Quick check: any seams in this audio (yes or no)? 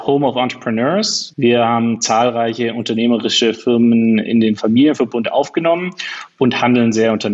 yes